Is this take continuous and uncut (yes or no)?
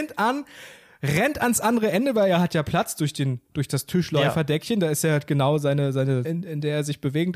no